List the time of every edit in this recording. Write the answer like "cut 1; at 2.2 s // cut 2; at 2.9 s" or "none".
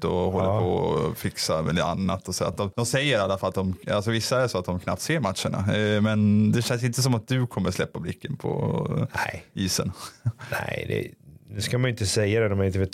none